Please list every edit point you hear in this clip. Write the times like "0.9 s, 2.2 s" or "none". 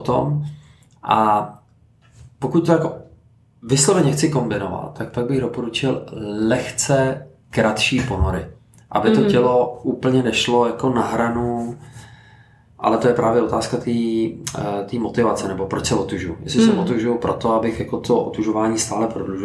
none